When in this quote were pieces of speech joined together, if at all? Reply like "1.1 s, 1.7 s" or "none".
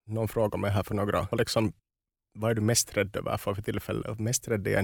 1.3 s

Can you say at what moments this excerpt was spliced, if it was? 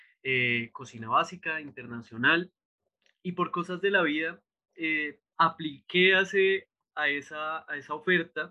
5.3 s

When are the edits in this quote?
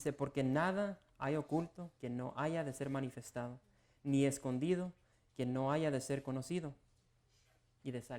1.9 s

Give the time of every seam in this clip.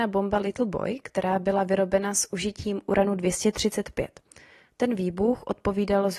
none

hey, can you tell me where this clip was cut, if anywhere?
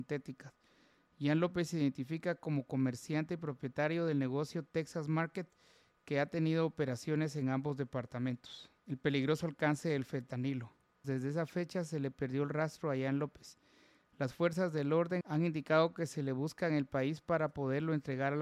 8.8 s, 11.0 s, 15.2 s

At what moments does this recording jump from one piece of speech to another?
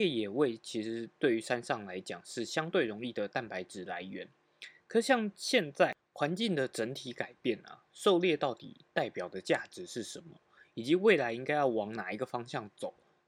none

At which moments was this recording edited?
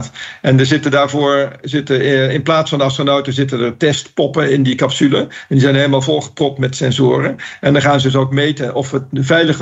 none

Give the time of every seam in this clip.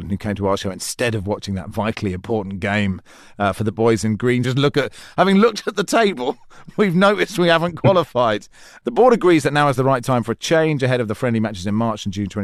4.4 s

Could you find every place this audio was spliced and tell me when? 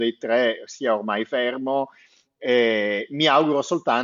none

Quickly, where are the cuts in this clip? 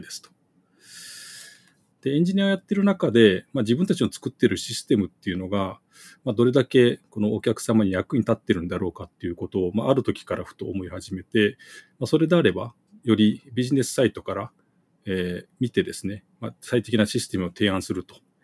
1.9 s

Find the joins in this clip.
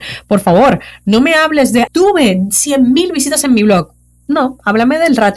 1.9 s

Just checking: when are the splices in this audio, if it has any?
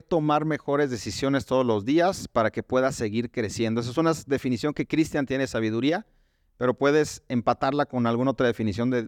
none

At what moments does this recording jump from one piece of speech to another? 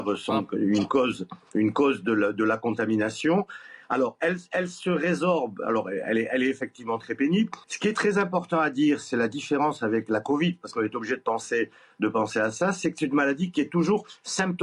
7.6 s

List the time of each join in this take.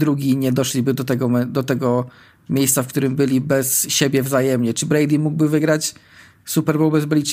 none

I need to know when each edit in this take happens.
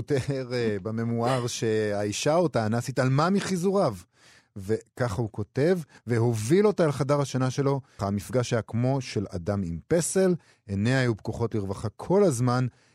6.0 s, 8.0 s

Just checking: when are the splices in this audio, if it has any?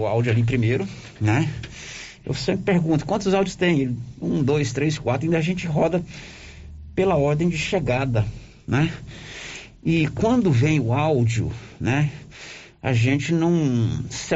2.2 s

